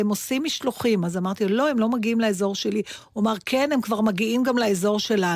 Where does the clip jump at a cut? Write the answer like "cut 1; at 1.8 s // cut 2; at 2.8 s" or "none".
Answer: none